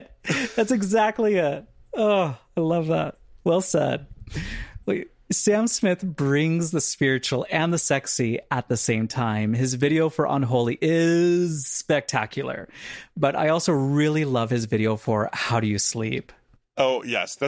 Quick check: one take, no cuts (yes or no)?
yes